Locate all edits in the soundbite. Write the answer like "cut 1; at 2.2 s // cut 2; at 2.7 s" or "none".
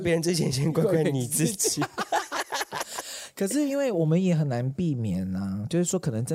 none